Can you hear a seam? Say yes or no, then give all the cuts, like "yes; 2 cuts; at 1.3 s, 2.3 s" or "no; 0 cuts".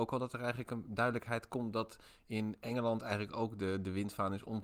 no; 0 cuts